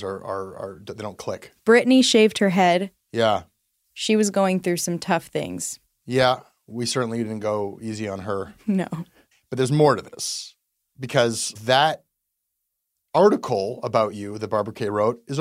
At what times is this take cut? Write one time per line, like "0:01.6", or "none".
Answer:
0:01.2